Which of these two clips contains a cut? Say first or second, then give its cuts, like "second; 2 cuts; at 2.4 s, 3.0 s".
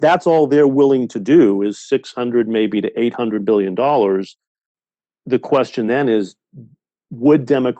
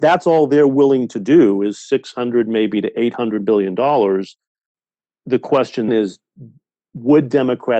second; 1 cut; at 5.9 s